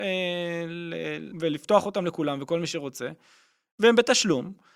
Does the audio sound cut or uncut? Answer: cut